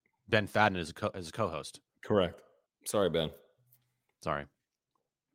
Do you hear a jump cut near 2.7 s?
yes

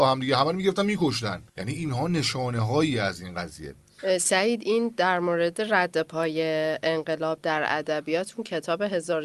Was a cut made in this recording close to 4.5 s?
no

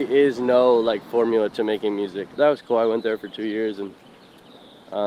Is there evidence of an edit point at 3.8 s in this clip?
no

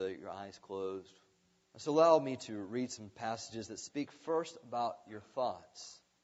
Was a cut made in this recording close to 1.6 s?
yes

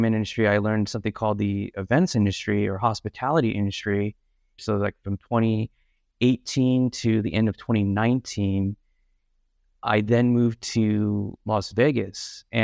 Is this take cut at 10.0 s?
no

